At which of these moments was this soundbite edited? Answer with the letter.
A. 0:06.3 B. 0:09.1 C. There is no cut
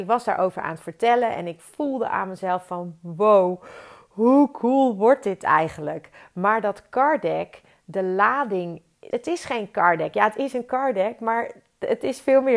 B